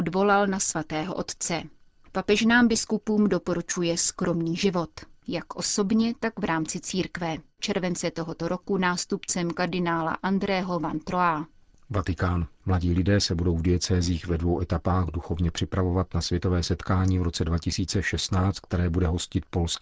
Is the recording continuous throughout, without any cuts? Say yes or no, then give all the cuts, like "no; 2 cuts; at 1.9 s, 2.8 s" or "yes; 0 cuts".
no; 2 cuts; at 7.6 s, 12.6 s